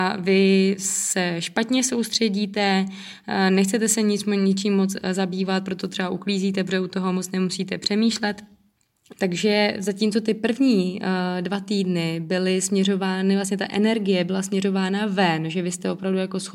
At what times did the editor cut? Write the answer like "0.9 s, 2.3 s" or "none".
9.1 s